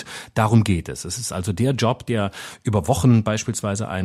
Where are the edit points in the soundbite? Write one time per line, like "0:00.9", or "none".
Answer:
none